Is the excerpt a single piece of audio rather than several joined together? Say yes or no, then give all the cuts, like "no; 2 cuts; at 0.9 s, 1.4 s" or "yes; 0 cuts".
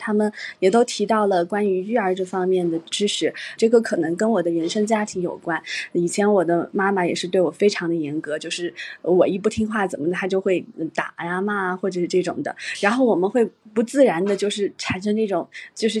no; 1 cut; at 3.6 s